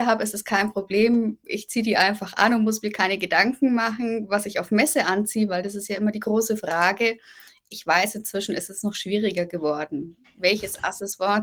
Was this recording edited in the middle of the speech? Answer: no; 0 cuts

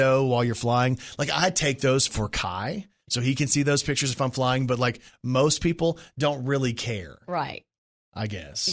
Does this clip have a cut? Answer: yes; 1 cut; at 2.1 s

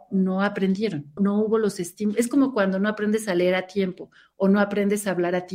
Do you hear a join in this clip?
yes; 1 cut; at 1.2 s

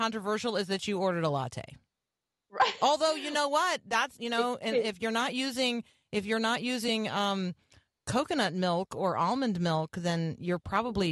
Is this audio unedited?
yes; 0 cuts

